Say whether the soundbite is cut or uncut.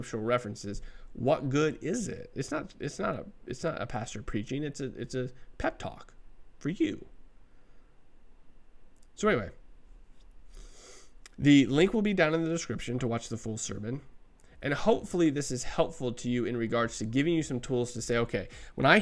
cut